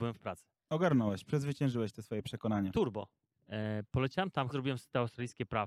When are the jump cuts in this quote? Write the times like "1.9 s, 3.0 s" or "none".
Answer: 3.4 s, 4.5 s